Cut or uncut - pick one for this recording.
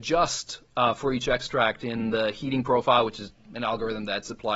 uncut